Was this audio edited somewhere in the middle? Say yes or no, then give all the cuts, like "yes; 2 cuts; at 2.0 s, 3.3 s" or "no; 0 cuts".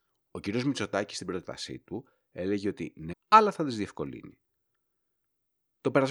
yes; 1 cut; at 3.1 s